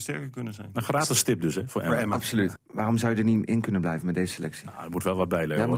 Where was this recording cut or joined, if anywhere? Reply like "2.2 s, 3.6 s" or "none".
2.6 s